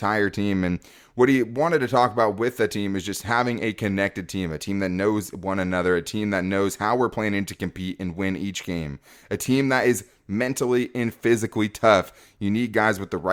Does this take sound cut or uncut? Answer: uncut